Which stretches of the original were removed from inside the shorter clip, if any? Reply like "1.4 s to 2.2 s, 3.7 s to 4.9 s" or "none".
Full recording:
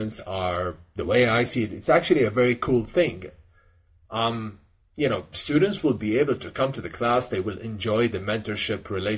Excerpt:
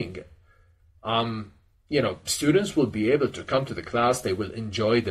none